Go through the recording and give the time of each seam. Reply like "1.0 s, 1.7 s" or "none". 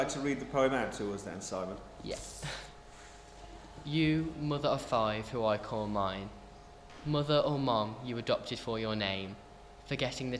none